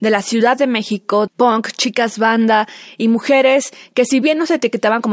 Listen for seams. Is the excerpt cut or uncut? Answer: cut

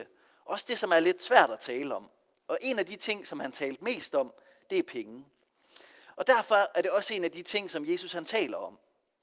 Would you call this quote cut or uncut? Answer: cut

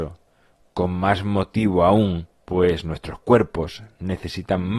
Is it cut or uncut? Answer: cut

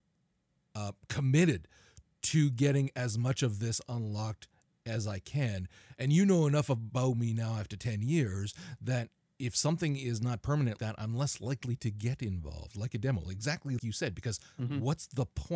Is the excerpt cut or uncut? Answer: cut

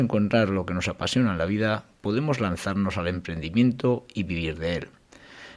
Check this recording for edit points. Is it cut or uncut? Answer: uncut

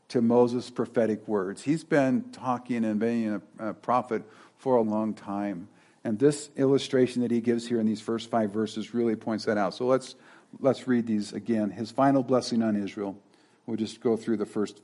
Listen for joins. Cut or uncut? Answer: cut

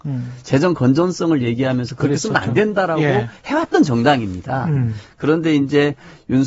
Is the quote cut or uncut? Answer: uncut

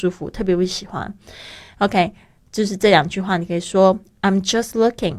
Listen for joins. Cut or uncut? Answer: uncut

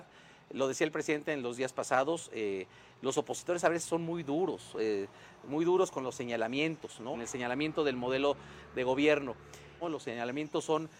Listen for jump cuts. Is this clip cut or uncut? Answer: cut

